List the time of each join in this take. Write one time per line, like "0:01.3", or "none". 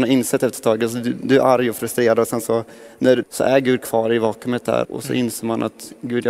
0:03.2
0:04.8

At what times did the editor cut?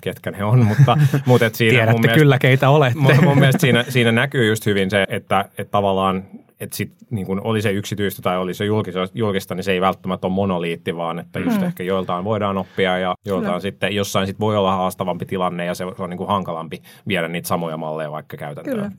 0:05.0

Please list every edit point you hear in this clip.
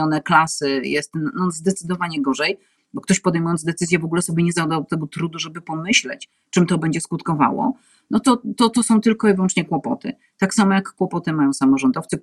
none

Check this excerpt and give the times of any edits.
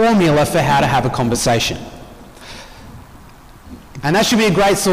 0:04.0

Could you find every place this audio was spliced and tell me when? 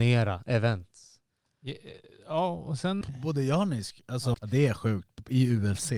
0:03.0
0:04.3

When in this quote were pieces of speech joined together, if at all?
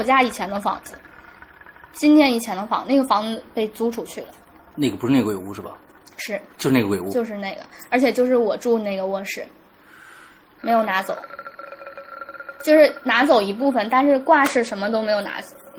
0:10.6

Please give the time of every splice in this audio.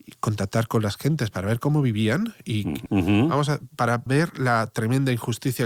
0:02.9
0:04.1

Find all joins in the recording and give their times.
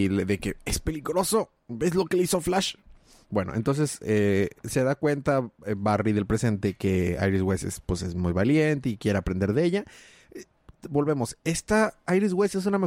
none

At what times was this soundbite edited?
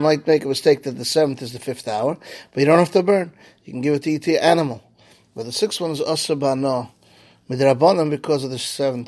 none

